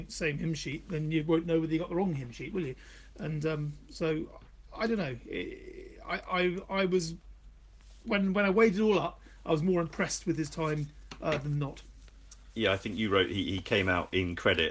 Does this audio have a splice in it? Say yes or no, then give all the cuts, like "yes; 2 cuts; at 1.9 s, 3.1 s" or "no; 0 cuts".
no; 0 cuts